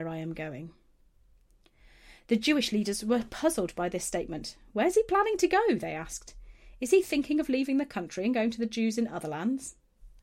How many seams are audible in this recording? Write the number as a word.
zero